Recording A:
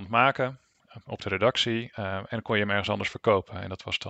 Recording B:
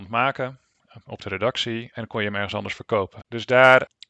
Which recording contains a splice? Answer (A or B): B